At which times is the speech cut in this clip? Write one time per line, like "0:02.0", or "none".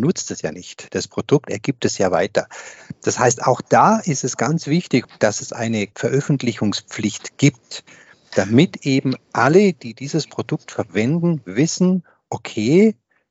none